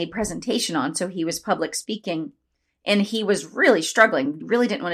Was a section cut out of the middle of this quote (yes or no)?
no